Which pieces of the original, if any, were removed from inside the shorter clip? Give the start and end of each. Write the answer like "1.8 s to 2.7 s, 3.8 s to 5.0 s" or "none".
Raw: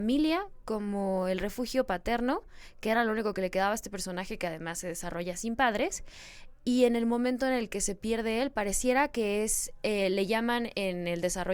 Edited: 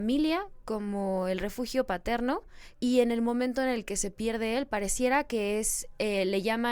2.7 s to 6.6 s